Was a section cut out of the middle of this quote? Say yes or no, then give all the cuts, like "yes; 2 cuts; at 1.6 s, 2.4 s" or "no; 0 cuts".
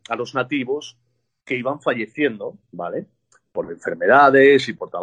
no; 0 cuts